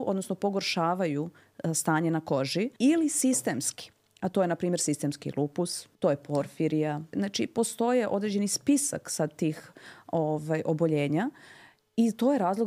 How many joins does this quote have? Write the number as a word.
three